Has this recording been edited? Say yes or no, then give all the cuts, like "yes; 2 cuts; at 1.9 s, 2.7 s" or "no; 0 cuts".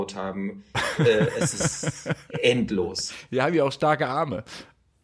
no; 0 cuts